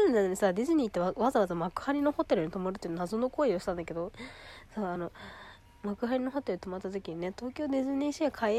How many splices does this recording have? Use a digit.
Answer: 0